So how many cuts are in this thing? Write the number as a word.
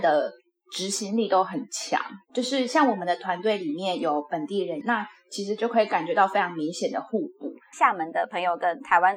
two